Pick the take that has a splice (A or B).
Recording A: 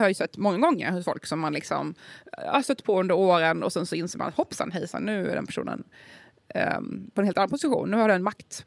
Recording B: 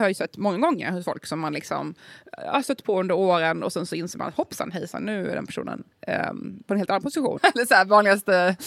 B